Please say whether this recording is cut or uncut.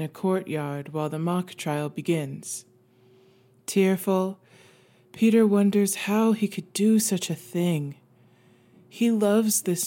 uncut